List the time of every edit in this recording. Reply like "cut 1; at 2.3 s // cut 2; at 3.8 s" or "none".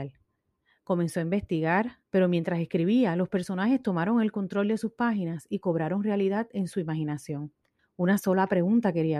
cut 1; at 2.0 s // cut 2; at 7.8 s